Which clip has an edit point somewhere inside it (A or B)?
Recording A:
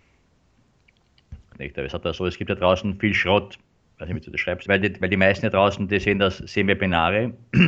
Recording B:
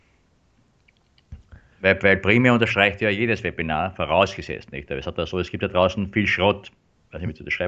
A